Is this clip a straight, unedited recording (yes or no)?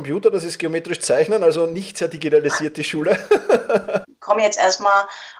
no